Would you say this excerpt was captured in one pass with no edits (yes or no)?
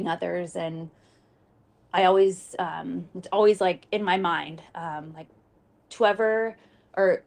yes